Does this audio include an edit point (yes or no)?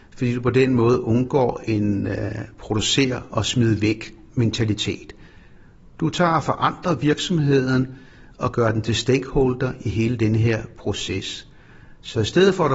no